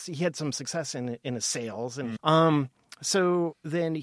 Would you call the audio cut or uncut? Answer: cut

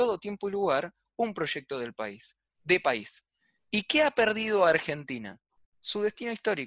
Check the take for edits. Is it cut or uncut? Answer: uncut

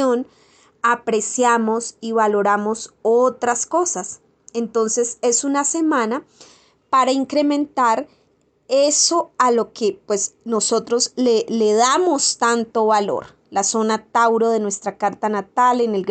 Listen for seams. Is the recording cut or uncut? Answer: uncut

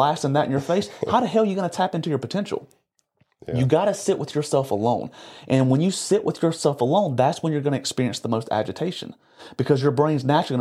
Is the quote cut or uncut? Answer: uncut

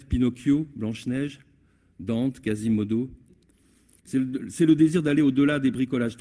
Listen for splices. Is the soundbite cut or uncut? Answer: cut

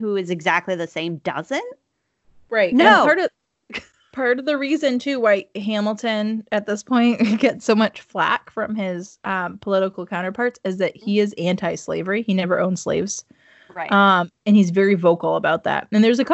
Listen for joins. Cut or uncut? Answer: uncut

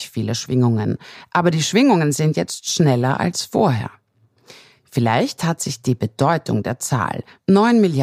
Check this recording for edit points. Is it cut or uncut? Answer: uncut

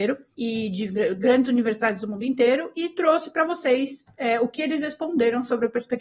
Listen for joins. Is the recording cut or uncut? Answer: uncut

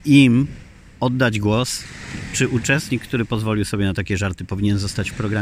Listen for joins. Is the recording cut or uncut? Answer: uncut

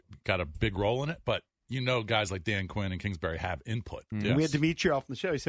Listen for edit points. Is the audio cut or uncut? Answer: cut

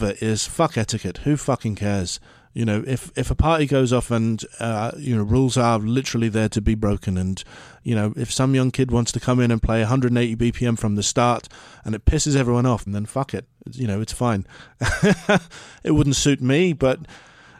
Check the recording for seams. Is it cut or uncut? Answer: cut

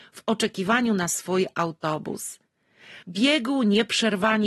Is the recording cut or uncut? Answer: cut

